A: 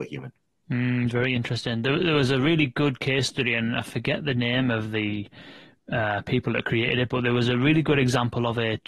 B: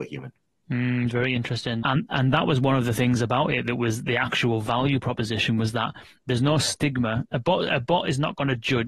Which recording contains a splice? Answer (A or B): B